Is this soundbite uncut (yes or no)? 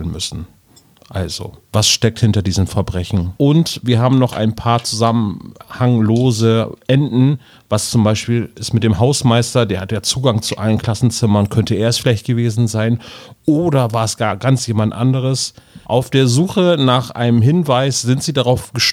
no